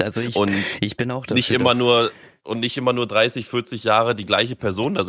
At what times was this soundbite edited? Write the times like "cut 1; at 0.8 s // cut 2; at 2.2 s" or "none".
none